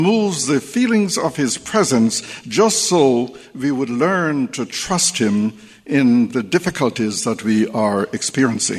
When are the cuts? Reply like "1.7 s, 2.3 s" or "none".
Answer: none